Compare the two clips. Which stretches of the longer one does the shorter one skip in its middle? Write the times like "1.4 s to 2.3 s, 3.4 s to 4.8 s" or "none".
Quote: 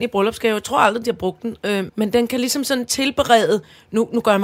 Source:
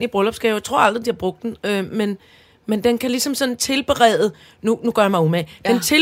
1.9 s to 2.6 s